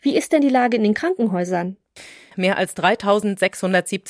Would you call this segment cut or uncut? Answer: cut